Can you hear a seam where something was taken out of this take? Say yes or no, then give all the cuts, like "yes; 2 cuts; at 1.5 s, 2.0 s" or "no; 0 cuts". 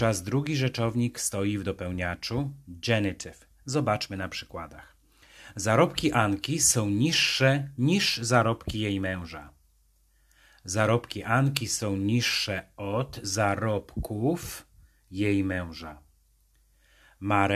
no; 0 cuts